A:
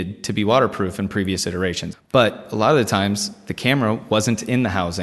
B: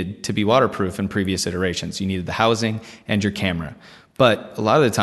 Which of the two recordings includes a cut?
A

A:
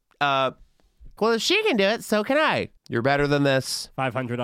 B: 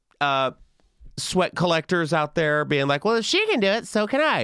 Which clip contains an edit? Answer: A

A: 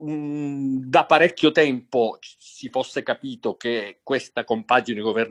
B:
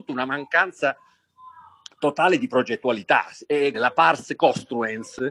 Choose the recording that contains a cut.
B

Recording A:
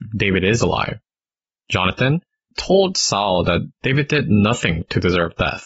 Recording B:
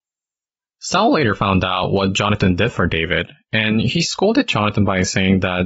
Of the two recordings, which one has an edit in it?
A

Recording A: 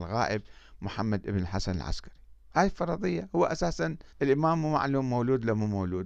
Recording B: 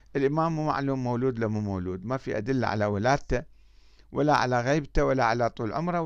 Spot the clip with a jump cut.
A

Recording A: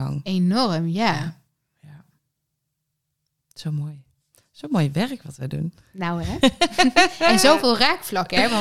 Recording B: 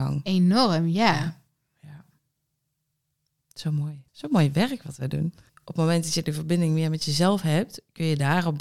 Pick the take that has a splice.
B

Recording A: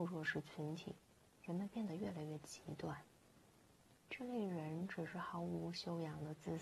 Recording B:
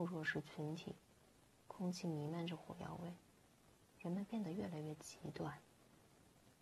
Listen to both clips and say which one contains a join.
A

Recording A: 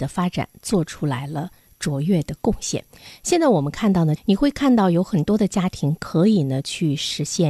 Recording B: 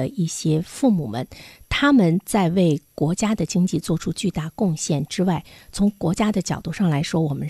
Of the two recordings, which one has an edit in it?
A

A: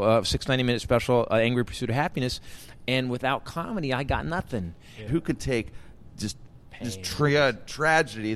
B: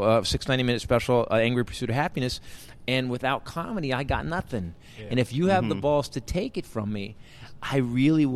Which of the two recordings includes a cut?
A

